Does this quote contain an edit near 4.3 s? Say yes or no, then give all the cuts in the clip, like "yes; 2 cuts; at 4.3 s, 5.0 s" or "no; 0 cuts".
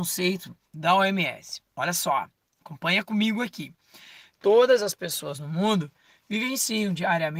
yes; 1 cut; at 4.3 s